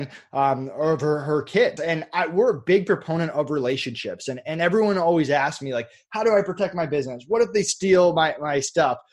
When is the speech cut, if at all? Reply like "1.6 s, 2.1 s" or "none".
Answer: 1.8 s

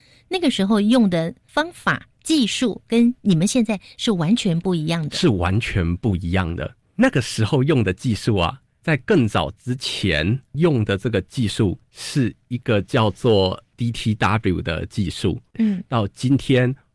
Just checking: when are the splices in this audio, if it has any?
6.8 s, 15.5 s

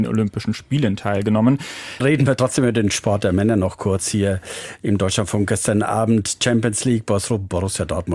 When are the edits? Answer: 2.0 s

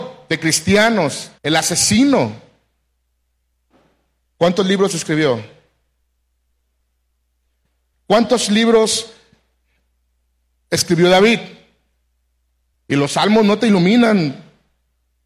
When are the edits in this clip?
1.4 s, 7.9 s, 12.7 s

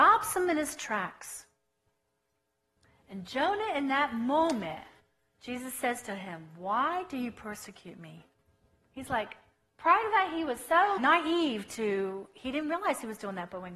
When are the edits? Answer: 11.0 s

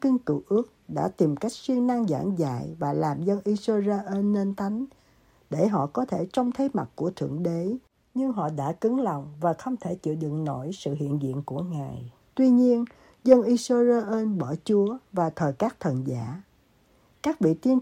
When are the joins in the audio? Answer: 12.2 s

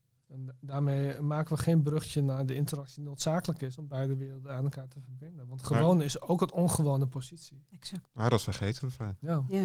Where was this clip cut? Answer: 8.0 s

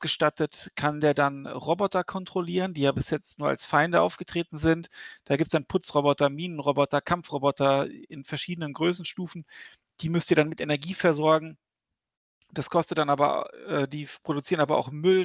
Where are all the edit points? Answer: none

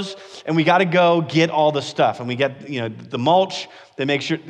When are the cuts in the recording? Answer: none

